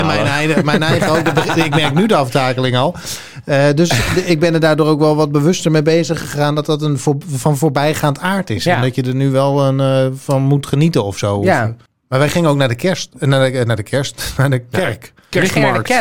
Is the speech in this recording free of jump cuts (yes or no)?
yes